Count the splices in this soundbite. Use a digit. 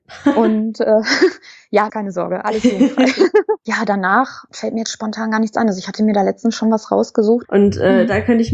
2